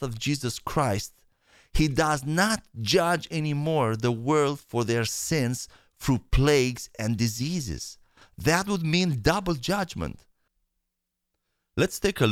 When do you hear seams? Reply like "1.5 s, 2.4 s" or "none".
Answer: none